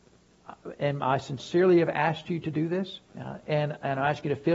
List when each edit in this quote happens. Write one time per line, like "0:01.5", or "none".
0:03.1